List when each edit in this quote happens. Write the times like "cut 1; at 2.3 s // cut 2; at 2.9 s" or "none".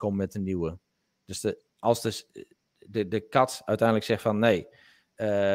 none

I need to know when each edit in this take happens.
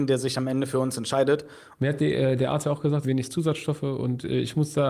cut 1; at 1.8 s // cut 2; at 3.0 s

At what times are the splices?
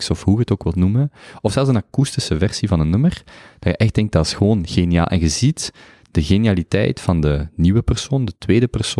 none

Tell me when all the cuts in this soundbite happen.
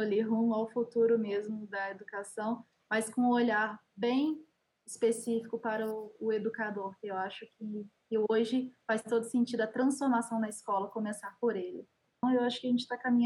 cut 1; at 12.2 s

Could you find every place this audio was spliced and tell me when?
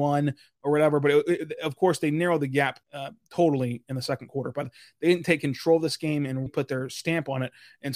cut 1; at 2.8 s // cut 2; at 6.5 s

